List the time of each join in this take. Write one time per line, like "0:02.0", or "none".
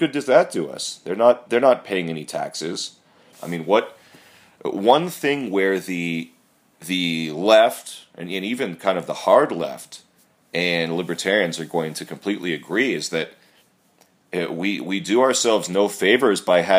0:03.3